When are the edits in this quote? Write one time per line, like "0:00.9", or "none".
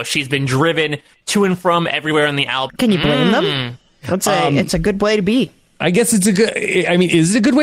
0:02.7

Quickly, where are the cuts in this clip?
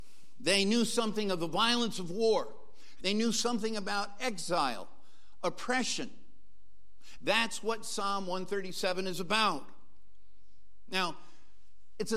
0:03.0
0:07.2

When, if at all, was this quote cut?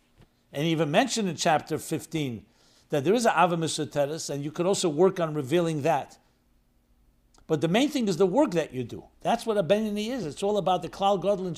none

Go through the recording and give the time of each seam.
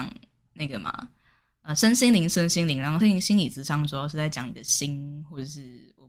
none

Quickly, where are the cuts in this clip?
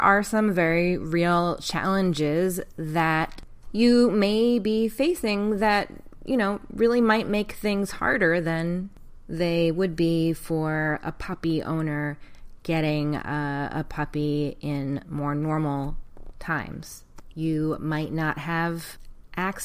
0:17.3

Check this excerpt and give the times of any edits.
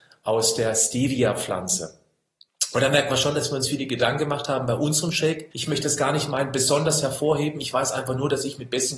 0:05.5

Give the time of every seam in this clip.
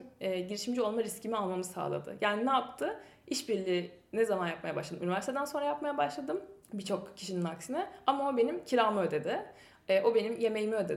0:06.6

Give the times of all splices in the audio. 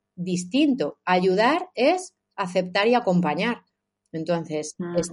none

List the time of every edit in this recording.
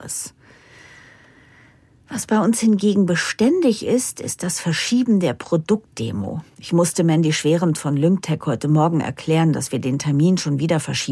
0:06.5

